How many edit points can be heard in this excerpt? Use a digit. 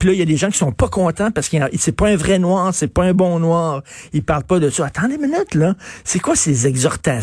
0